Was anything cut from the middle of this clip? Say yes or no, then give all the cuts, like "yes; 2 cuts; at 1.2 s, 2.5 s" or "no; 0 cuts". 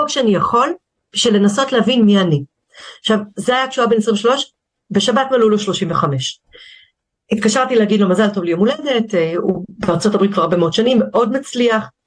no; 0 cuts